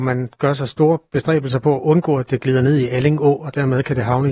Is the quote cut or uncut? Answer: uncut